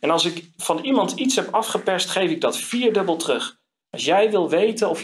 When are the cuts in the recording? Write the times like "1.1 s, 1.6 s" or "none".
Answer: 3.8 s